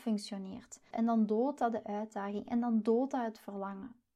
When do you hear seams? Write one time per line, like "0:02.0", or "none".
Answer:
0:00.9